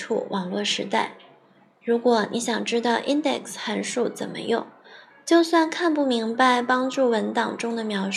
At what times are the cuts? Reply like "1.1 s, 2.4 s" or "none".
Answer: none